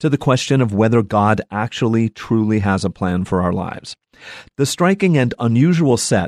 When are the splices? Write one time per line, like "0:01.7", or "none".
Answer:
none